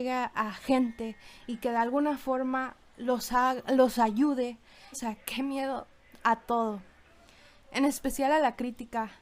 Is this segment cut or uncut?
cut